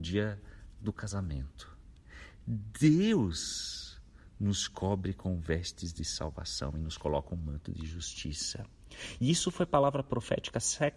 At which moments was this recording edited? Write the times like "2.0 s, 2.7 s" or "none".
none